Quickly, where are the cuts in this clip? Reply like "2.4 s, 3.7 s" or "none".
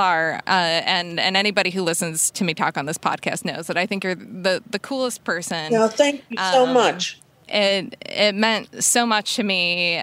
none